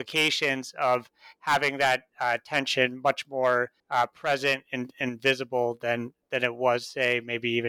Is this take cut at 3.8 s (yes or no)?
yes